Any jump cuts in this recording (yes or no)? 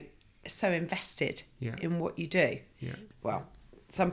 yes